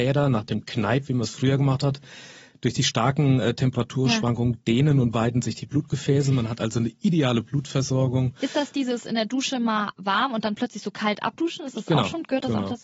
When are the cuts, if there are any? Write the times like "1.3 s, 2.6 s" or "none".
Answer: none